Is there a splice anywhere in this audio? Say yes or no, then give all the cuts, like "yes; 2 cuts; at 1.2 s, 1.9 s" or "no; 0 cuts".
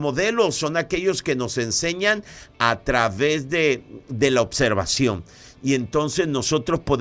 no; 0 cuts